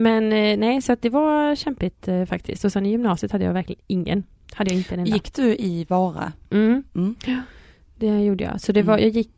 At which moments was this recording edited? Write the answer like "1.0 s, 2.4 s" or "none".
none